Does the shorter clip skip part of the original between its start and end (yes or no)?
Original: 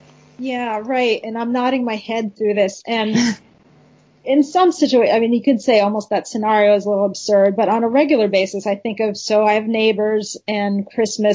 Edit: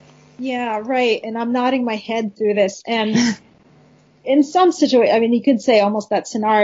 no